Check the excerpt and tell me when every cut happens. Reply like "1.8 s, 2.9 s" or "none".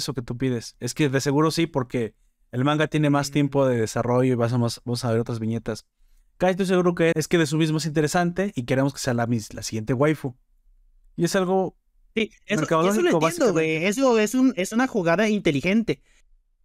7.1 s